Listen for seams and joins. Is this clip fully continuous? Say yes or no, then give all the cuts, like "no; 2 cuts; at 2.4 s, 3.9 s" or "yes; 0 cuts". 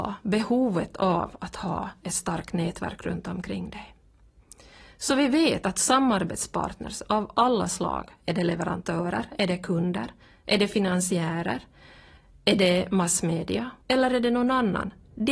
no; 1 cut; at 13.8 s